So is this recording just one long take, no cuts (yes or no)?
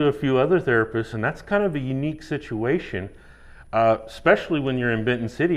yes